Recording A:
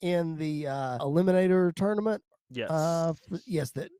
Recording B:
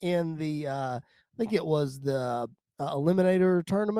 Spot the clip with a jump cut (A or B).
A